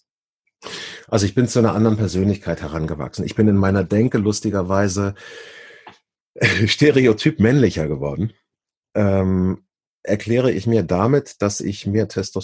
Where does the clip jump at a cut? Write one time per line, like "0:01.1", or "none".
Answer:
none